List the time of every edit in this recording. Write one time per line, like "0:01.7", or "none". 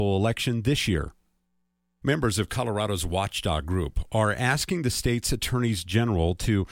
0:02.0